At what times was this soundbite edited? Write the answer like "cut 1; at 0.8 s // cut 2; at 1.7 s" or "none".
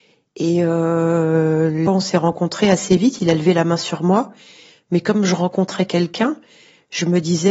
cut 1; at 1.9 s